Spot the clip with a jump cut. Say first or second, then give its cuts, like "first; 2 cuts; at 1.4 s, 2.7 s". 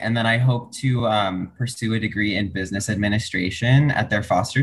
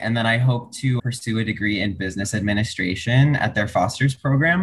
second; 1 cut; at 1.0 s